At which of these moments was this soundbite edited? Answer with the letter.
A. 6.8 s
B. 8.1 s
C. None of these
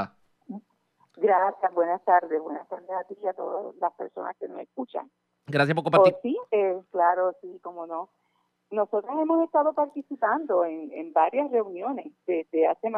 A